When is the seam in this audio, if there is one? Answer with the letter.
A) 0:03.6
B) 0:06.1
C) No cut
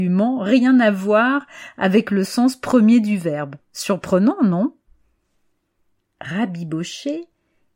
C